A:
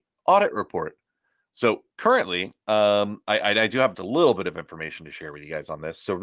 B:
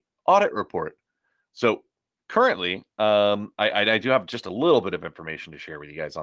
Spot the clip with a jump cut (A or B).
A